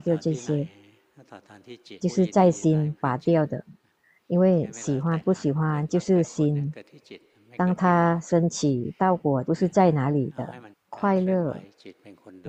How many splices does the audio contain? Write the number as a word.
three